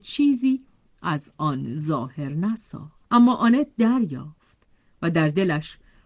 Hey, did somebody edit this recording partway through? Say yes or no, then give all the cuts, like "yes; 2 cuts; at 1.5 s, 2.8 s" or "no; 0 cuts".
yes; 1 cut; at 3.0 s